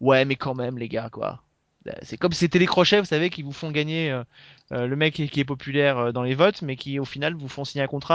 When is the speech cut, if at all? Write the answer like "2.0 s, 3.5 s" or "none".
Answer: none